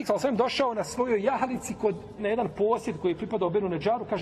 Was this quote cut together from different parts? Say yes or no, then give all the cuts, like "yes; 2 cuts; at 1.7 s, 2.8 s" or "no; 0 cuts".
yes; 1 cut; at 2.2 s